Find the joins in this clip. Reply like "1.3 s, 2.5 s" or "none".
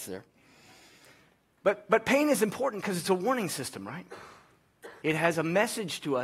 5.0 s